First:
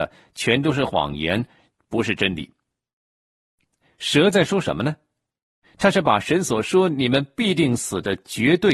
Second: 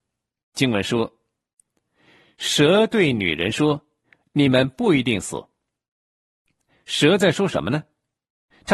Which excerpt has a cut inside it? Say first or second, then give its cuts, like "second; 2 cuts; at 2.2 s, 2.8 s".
first; 1 cut; at 3.1 s